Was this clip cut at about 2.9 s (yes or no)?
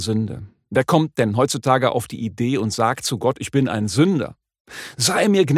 no